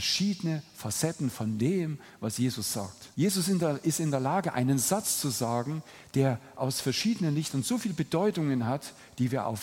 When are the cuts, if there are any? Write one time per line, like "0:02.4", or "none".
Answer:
0:03.1